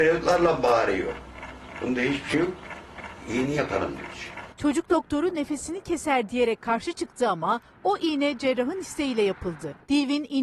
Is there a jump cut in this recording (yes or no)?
no